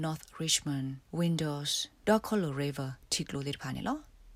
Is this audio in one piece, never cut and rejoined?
no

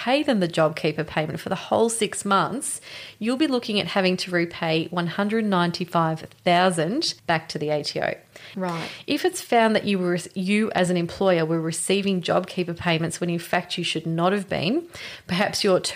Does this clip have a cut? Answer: yes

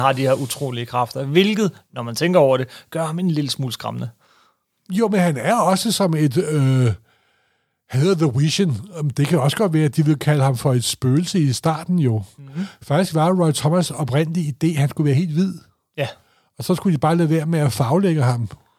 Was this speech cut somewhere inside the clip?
no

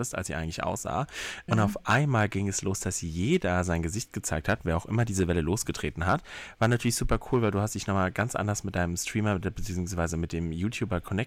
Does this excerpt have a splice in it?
yes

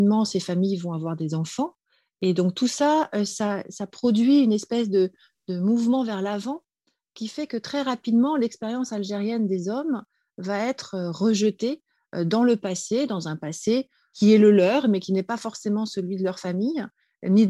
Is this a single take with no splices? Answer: yes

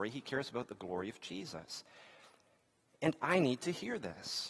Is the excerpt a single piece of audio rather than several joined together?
yes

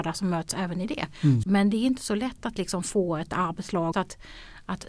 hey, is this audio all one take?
no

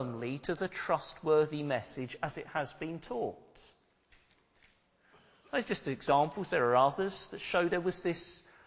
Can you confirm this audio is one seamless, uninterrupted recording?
yes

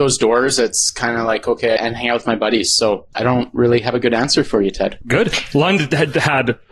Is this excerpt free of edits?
no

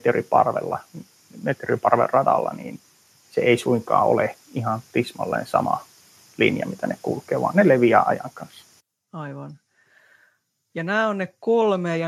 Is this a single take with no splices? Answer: yes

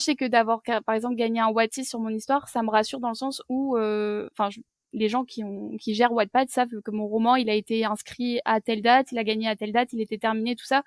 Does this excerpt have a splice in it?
no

